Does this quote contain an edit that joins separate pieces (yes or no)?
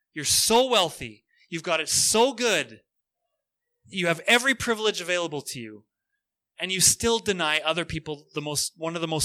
no